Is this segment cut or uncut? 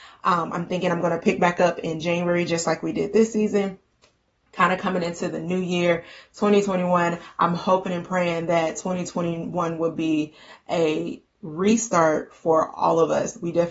uncut